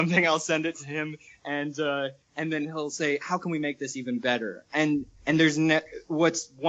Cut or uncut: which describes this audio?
uncut